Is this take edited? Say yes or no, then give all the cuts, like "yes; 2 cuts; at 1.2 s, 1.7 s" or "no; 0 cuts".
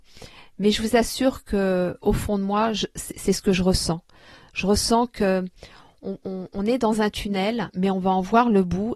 no; 0 cuts